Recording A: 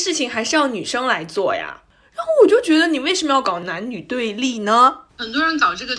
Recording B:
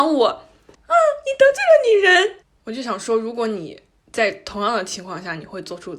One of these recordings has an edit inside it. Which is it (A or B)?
A